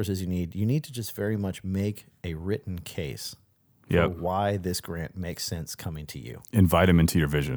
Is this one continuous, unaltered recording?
yes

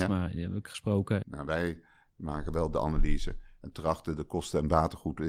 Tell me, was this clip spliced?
yes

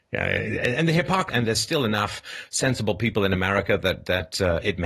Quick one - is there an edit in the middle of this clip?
yes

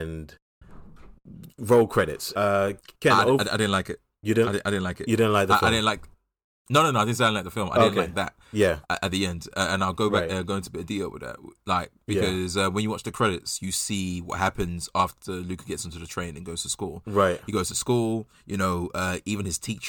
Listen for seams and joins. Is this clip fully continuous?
no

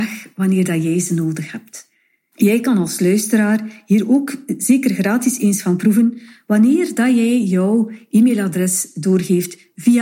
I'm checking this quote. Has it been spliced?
yes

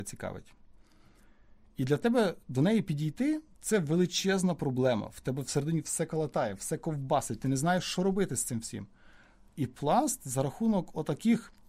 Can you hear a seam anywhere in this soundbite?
no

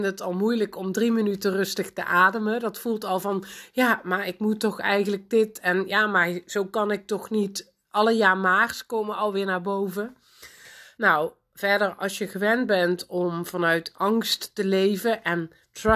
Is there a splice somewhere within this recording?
yes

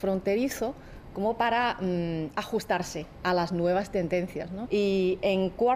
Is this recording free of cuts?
no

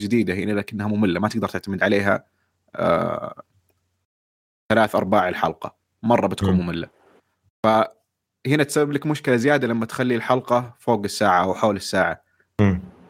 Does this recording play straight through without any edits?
yes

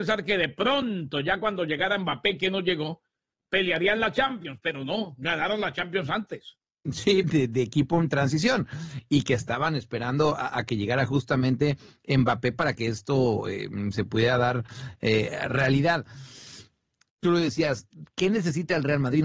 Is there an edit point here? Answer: yes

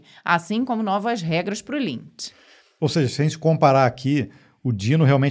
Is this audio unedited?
yes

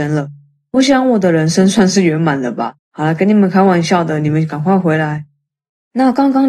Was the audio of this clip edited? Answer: yes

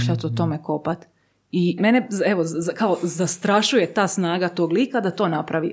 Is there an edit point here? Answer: yes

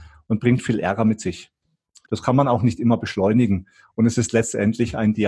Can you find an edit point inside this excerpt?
yes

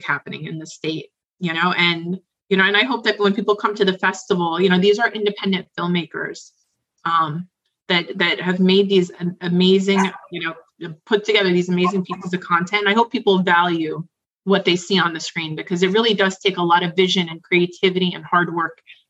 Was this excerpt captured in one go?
yes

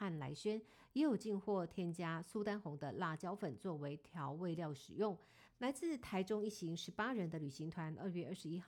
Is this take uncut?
no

